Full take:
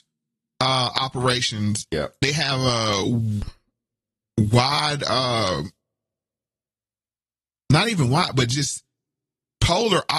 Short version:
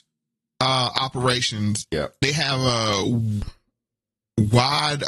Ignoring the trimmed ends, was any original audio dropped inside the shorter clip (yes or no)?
no